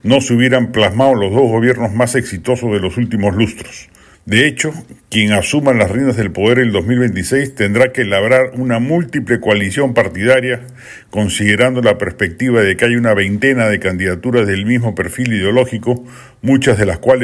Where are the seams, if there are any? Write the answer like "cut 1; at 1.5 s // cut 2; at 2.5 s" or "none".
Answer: cut 1; at 4.1 s